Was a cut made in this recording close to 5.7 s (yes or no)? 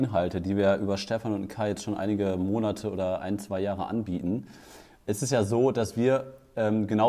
no